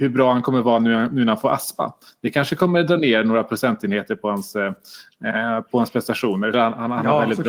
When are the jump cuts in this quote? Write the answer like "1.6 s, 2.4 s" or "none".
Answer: 6.5 s